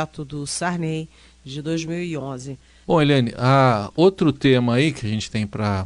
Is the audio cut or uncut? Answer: cut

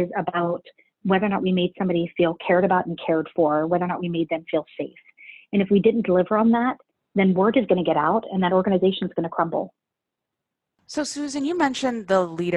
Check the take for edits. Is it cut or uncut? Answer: uncut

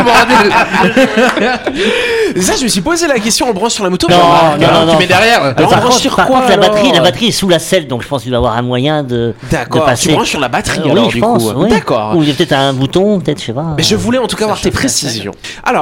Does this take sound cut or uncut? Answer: cut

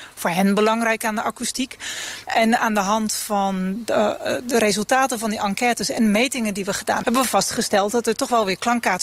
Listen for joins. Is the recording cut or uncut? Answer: cut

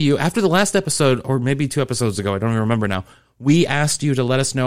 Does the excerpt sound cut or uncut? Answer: uncut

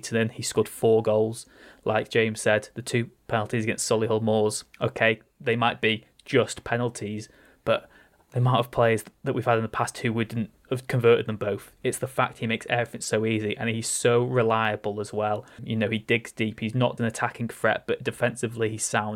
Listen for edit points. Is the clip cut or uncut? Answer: cut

